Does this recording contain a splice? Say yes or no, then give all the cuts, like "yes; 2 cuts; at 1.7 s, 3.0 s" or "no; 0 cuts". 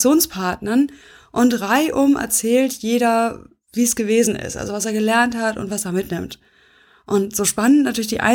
no; 0 cuts